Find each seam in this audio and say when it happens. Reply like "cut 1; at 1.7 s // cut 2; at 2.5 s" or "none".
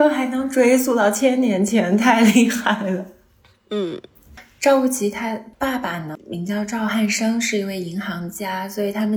none